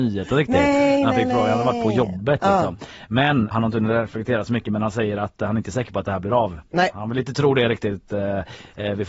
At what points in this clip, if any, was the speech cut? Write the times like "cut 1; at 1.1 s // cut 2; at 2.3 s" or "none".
cut 1; at 3.5 s